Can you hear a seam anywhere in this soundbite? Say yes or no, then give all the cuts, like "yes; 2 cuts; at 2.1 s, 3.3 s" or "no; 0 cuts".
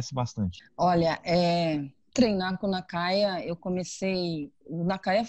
no; 0 cuts